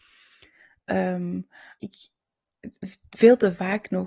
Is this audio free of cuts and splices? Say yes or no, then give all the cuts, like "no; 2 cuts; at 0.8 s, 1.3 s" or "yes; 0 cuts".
no; 1 cut; at 1.8 s